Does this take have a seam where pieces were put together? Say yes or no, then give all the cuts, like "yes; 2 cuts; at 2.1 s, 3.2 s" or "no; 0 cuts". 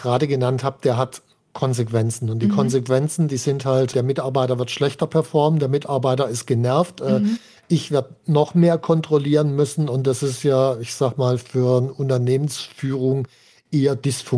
no; 0 cuts